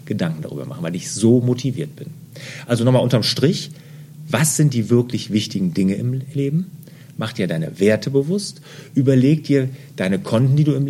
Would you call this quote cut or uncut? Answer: uncut